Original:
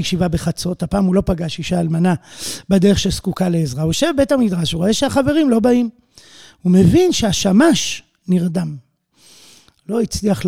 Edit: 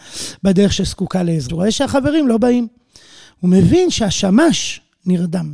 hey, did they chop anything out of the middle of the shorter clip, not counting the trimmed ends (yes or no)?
yes